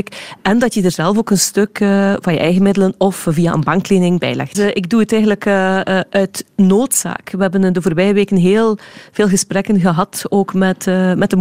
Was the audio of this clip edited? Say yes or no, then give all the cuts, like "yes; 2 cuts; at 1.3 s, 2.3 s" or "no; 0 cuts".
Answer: yes; 1 cut; at 4.5 s